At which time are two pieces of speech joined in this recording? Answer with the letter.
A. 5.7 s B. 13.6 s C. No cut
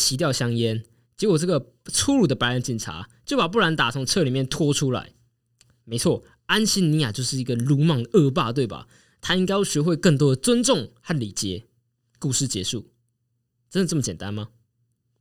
C